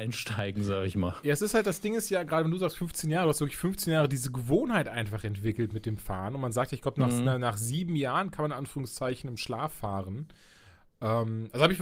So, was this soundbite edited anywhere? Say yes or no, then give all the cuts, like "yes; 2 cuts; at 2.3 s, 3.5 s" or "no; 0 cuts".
no; 0 cuts